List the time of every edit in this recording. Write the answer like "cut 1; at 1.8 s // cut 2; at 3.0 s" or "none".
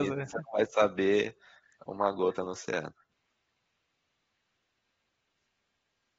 none